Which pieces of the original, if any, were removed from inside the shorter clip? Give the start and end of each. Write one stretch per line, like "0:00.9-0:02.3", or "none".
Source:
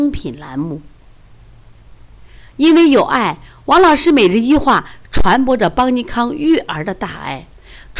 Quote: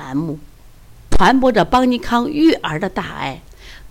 0:01.5-0:05.2